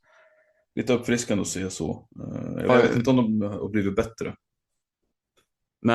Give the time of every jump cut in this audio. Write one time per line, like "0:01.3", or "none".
0:02.7